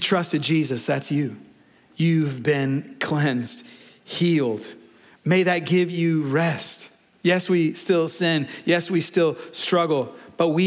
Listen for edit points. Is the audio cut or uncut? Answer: uncut